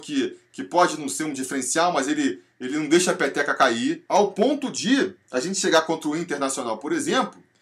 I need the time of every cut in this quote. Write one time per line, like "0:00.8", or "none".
0:04.0